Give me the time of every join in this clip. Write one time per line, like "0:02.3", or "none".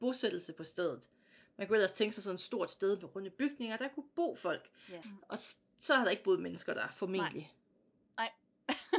0:05.0